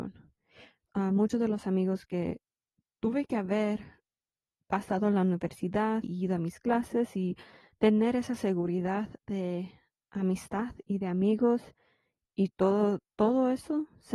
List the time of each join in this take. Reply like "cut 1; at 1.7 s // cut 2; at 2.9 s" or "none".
cut 1; at 6.0 s